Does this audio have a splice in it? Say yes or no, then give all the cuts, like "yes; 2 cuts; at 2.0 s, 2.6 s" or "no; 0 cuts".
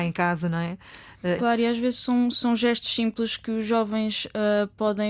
yes; 1 cut; at 1.4 s